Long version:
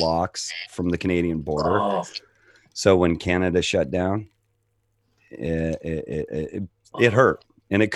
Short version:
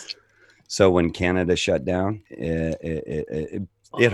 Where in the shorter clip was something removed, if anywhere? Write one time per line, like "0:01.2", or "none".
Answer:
0:02.3